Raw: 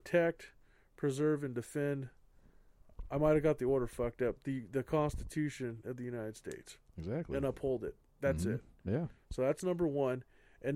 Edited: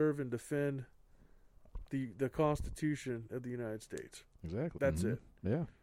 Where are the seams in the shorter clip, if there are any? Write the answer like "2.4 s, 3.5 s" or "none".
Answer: 1.9 s, 4.8 s

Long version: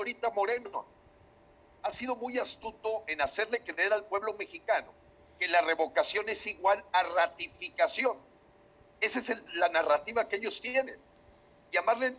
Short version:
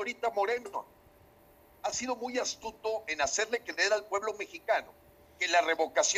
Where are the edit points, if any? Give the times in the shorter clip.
none

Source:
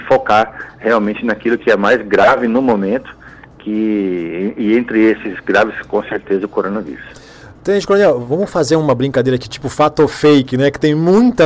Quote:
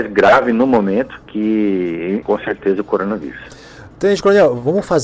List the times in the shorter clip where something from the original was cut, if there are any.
1.2 s, 2.2 s

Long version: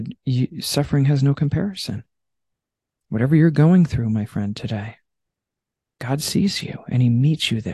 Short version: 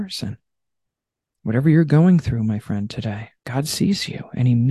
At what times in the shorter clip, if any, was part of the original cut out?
3.4 s

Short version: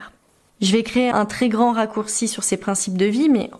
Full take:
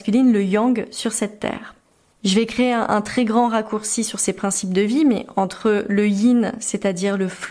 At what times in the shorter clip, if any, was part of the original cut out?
1.1 s

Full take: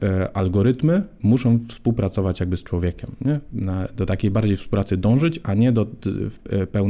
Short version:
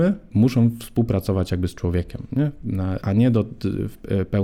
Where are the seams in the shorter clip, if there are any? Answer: 3.0 s

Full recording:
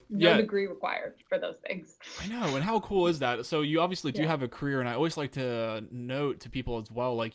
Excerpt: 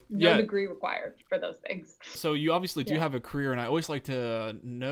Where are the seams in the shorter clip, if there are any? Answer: 2.1 s

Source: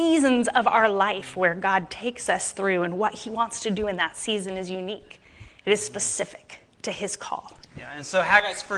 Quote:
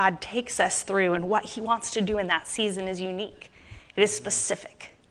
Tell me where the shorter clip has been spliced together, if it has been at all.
none

